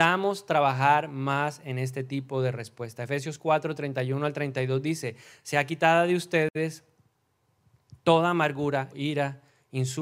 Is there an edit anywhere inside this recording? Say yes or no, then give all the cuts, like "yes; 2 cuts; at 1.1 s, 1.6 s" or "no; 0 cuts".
yes; 1 cut; at 8.9 s